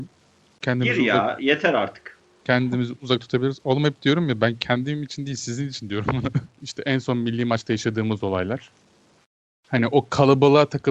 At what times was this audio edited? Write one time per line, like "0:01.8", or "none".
0:06.5

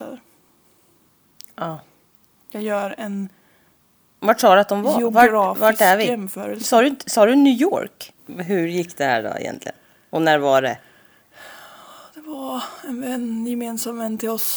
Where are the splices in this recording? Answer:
0:08.2

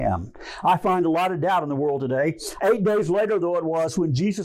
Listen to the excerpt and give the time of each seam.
0:02.6

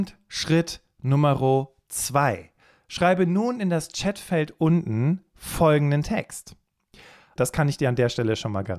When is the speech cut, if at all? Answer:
0:07.4

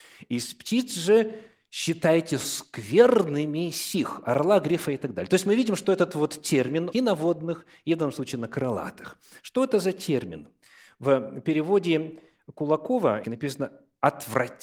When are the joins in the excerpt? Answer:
0:06.9
0:13.2

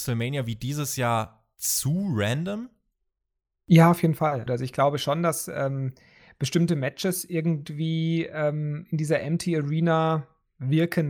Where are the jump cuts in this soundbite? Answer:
0:04.5

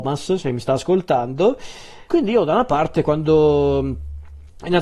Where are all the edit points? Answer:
0:02.1

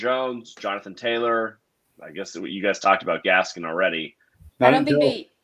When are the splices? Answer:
0:04.5

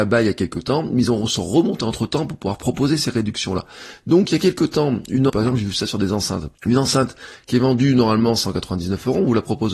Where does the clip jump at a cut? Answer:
0:05.3
0:06.6

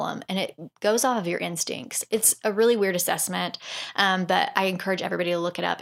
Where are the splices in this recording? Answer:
none

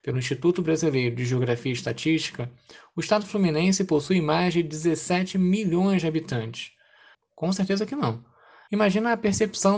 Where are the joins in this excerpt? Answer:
0:07.1
0:08.7

